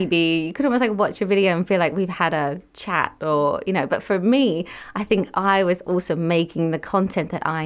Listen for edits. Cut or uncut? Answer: uncut